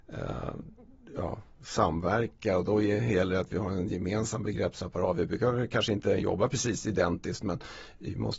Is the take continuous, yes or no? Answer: yes